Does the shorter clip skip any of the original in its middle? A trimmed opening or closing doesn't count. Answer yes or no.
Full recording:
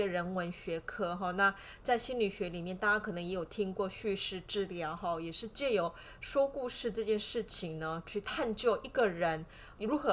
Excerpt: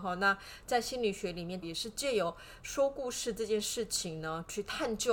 yes